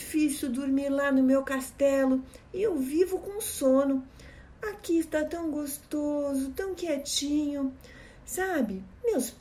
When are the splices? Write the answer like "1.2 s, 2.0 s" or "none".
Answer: none